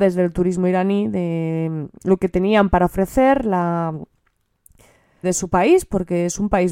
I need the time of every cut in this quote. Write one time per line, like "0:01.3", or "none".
0:05.2